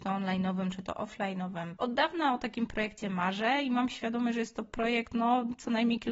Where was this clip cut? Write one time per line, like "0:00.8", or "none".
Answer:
0:01.8